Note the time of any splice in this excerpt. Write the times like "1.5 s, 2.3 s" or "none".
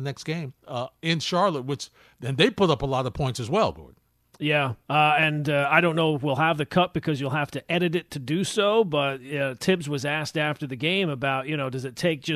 none